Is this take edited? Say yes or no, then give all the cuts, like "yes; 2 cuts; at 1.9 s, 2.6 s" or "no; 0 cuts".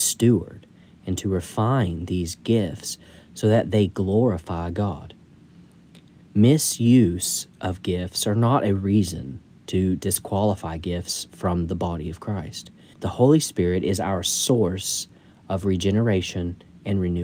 yes; 1 cut; at 12.9 s